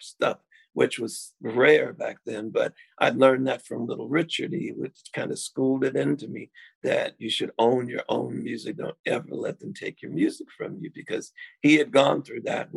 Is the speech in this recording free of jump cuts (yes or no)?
yes